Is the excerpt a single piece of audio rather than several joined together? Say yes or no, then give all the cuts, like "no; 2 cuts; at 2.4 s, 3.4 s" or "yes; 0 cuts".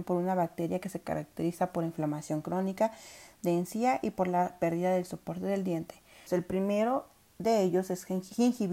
no; 1 cut; at 6.3 s